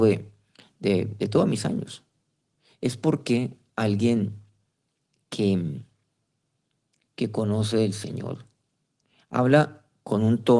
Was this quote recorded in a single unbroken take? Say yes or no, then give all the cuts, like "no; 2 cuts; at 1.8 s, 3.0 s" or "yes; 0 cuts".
yes; 0 cuts